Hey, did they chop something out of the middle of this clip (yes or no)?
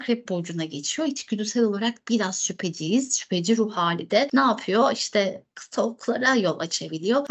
no